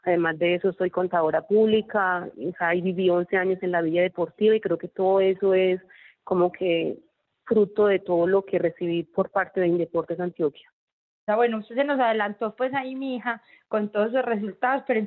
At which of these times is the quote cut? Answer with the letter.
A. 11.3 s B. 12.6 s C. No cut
A